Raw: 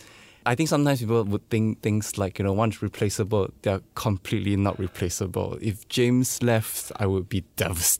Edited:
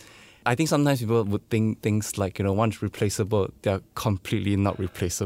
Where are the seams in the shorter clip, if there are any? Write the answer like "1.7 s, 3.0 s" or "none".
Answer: none

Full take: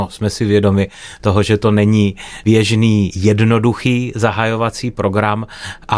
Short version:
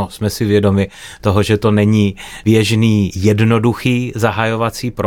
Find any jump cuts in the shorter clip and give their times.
none

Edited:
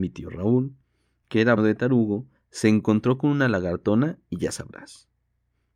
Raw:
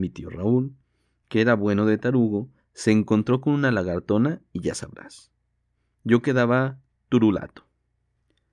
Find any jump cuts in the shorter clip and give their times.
1.6 s

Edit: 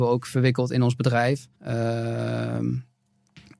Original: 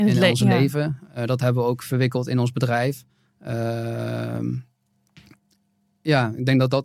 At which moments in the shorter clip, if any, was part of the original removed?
1.6 s

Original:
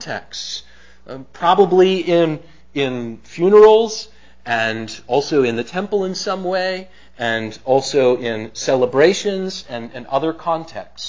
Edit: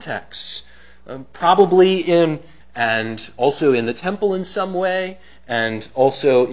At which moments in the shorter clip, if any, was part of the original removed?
2.6 s

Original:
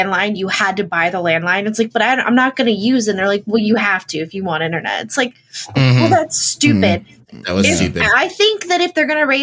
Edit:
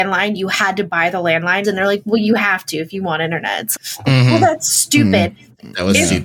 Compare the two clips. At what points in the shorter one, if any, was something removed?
1.6 s, 3.8 s

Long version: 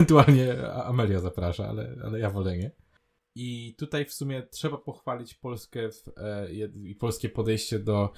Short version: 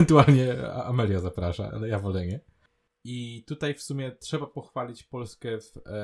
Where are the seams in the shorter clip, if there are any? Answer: 1.7 s

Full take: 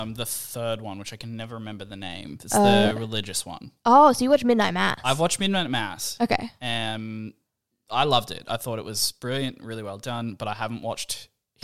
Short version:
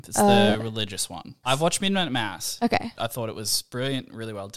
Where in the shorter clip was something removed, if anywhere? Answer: 1.4 s, 2.9 s

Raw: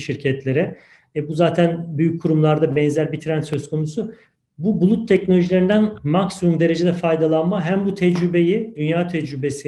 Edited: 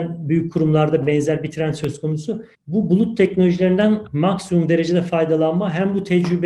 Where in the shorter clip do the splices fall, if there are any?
2.5 s

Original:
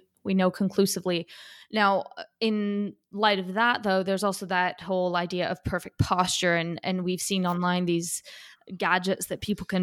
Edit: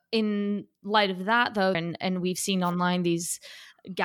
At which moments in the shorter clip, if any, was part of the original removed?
1.7 s

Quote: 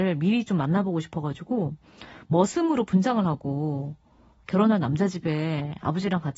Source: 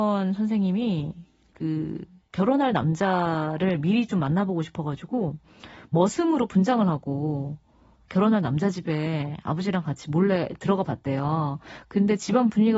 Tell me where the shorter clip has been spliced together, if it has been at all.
none

